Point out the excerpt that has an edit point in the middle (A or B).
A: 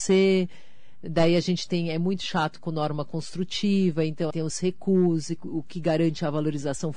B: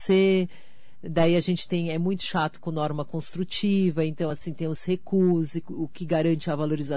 A